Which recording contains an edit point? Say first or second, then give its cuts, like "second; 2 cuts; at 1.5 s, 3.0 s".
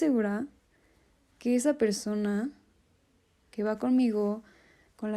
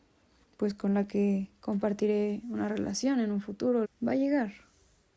second; 1 cut; at 3.8 s